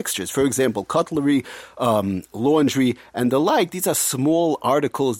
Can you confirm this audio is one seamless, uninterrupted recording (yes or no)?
yes